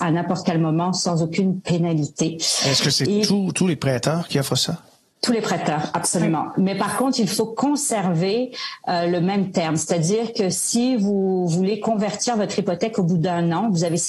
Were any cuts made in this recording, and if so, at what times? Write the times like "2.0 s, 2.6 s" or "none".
none